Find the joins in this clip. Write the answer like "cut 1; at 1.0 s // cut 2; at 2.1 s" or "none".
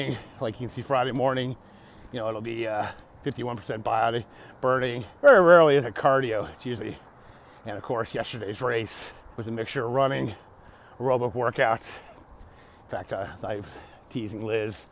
cut 1; at 5.2 s // cut 2; at 9.3 s